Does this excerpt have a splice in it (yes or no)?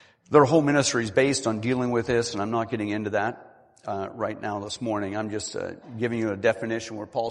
no